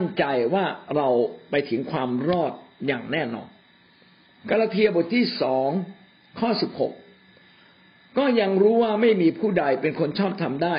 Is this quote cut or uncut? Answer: uncut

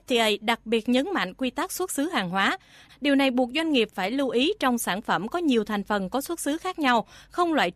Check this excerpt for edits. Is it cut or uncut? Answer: cut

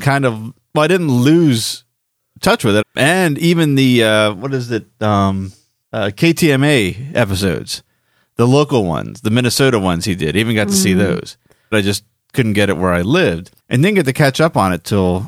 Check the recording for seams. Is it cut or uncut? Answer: cut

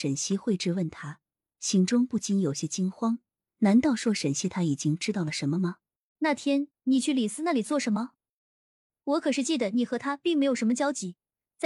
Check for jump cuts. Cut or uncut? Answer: cut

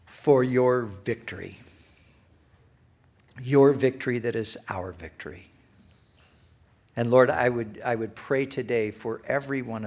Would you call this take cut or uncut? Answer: uncut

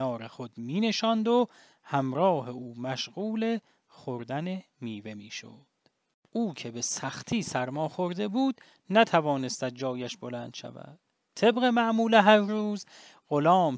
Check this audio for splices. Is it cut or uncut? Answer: cut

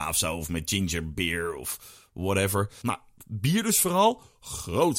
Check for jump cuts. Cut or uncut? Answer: cut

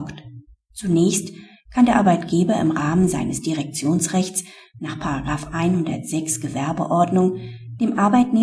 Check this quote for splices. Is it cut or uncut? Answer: uncut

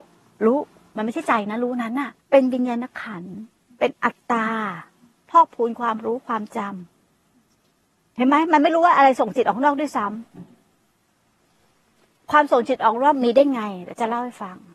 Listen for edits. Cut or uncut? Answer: cut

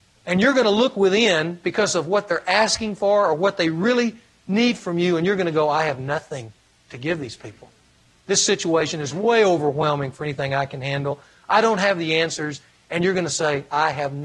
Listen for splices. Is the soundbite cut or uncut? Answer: uncut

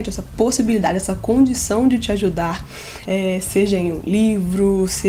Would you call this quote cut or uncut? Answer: cut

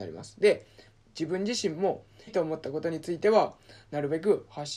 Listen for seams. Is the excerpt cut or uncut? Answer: cut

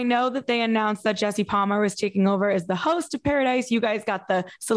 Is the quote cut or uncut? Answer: uncut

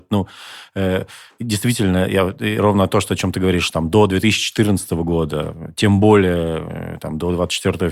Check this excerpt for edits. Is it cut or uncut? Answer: uncut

